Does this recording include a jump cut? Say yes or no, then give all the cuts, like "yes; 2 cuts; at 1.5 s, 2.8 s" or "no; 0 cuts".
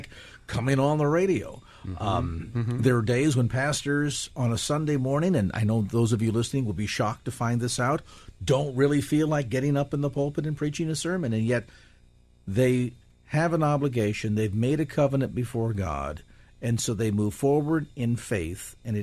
no; 0 cuts